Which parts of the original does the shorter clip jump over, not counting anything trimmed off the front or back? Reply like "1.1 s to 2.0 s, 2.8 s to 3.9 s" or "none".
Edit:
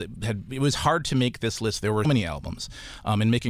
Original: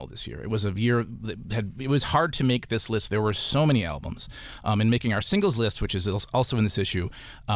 3.3 s to 3.6 s